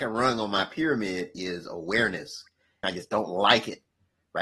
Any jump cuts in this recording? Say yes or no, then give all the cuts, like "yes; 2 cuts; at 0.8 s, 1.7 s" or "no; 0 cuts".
yes; 1 cut; at 2.8 s